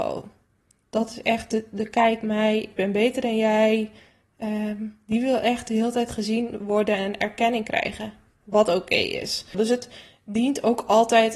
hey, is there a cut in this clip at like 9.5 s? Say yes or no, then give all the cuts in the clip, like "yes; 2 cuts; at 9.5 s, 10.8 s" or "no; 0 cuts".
yes; 1 cut; at 9.5 s